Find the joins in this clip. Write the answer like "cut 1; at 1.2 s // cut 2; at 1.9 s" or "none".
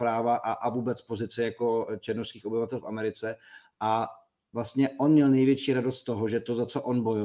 none